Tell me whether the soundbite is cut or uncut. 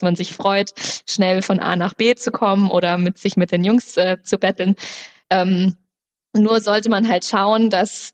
uncut